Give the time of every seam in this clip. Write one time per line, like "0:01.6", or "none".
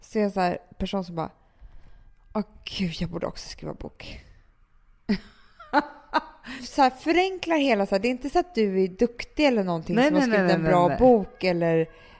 none